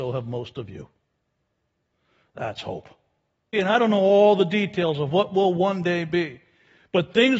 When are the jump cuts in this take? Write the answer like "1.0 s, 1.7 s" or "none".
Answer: 3.5 s